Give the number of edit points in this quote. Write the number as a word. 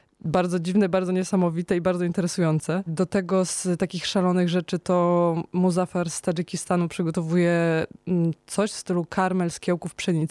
one